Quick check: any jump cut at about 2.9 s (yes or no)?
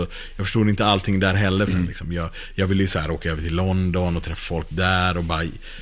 no